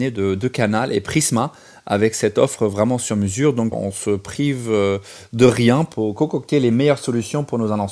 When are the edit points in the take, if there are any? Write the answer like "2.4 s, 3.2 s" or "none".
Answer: 3.7 s